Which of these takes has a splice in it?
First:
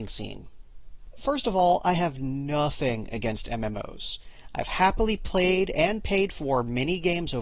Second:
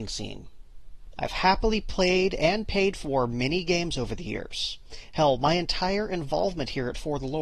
second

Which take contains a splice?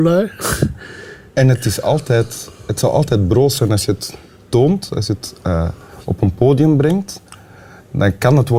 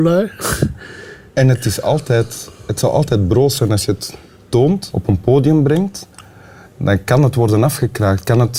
second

